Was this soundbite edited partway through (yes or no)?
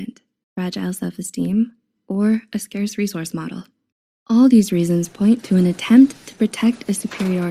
yes